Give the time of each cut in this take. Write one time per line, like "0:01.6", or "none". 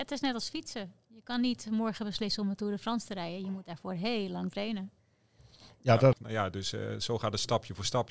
0:06.1